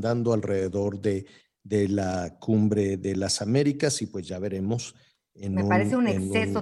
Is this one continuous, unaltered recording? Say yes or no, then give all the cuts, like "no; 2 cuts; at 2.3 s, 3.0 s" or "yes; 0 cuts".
yes; 0 cuts